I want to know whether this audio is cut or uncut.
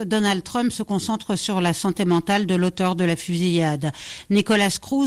uncut